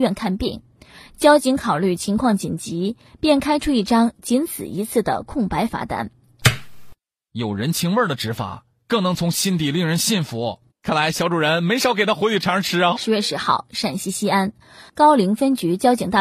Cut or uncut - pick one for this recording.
cut